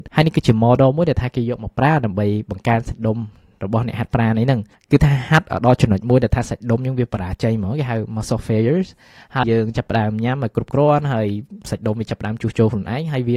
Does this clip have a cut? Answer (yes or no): yes